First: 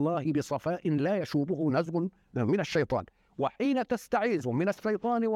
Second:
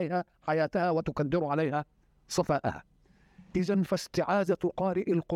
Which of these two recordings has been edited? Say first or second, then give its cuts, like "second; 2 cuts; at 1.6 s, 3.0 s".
second; 1 cut; at 3.5 s